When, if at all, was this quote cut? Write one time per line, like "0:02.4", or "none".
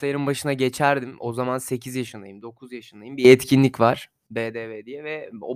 none